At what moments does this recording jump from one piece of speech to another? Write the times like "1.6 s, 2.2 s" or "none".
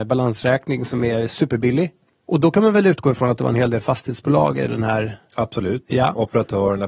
2.3 s